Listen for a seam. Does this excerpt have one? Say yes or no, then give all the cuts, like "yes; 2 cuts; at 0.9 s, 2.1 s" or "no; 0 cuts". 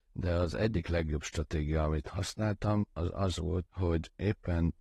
yes; 1 cut; at 3.7 s